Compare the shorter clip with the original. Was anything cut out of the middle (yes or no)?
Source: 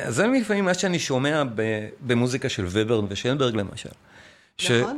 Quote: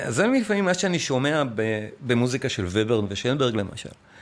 no